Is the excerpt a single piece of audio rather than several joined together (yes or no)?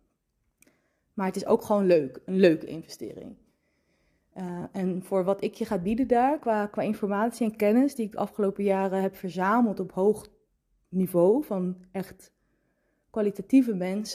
yes